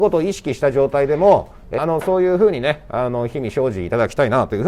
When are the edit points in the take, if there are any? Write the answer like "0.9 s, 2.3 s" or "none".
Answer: 1.8 s